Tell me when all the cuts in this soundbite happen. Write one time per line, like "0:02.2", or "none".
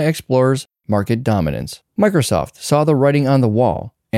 0:01.9